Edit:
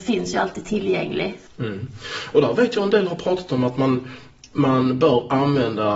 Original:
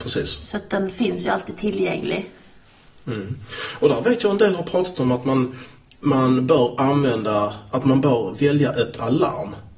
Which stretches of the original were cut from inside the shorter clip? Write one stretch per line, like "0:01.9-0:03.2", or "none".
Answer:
0:02.4-0:02.9